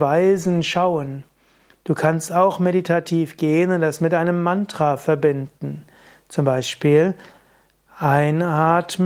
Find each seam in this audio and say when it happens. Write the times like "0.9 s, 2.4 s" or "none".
none